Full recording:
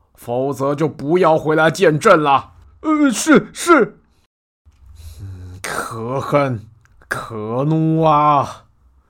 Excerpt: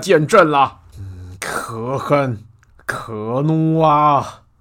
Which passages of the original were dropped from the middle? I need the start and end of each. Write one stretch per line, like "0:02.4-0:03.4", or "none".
0:02.6-0:05.1

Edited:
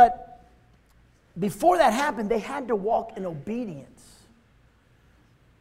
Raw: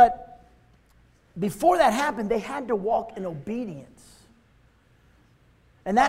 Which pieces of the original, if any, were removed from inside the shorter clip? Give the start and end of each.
none

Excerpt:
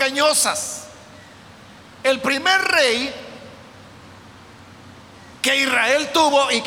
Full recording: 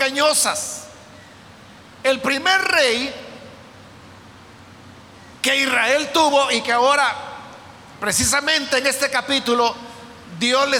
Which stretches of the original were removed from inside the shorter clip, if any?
none

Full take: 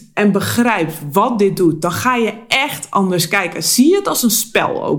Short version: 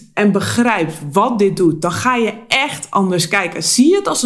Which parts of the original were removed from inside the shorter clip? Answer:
none

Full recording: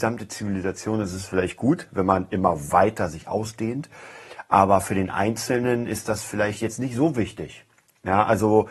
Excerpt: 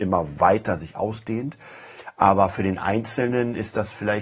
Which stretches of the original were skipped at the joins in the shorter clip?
none

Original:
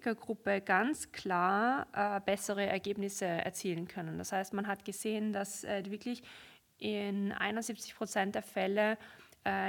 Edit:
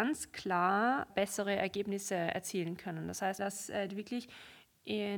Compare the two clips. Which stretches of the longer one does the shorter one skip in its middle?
0:01.9-0:02.2
0:04.5-0:05.3

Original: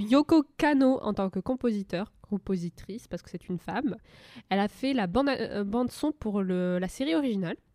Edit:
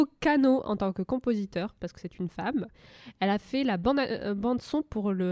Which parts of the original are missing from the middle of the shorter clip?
0:02.2-0:03.1

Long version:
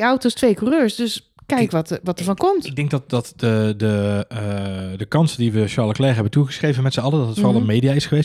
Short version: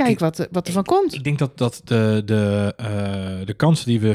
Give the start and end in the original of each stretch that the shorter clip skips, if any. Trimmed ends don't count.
none

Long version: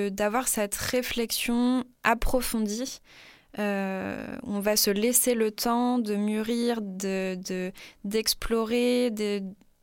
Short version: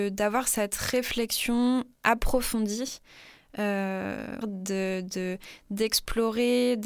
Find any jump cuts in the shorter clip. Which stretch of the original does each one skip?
0:04.4-0:06.8

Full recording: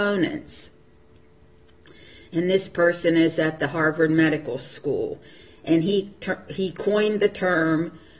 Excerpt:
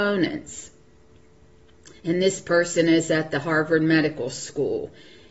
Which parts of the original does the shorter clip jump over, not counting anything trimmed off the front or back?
0:02.0-0:02.3

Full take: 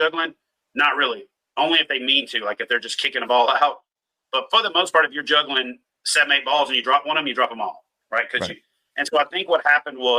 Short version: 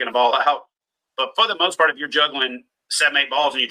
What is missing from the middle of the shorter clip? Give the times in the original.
none

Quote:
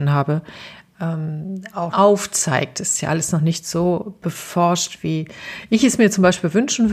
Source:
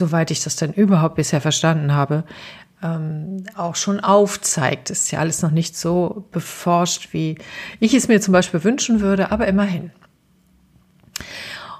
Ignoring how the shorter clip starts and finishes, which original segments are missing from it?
0:03.7-0:04.0

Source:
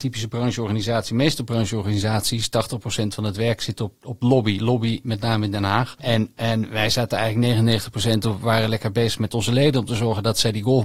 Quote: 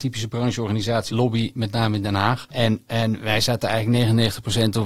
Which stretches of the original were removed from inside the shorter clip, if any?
0:01.1-0:04.6

